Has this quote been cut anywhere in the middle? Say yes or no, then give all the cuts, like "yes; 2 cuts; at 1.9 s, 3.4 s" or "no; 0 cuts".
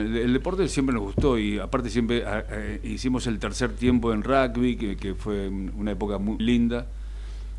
yes; 1 cut; at 6.4 s